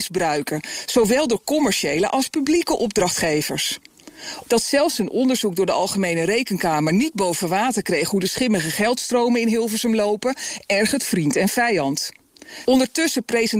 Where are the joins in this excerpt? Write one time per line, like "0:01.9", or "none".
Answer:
0:04.5
0:12.7